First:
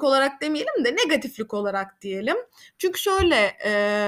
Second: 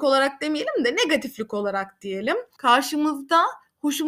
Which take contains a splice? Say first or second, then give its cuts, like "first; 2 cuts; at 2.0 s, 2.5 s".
second; 1 cut; at 2.6 s